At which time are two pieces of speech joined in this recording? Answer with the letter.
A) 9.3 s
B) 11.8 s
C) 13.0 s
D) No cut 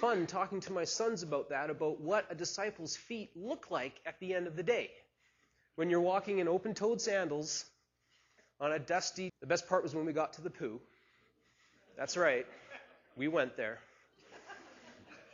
A